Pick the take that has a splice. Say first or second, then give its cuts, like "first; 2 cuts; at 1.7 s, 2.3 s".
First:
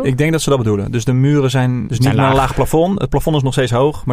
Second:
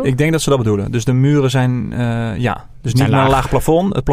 first; 1 cut; at 1.9 s